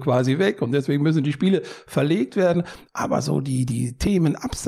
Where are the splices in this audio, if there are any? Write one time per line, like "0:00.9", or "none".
0:02.9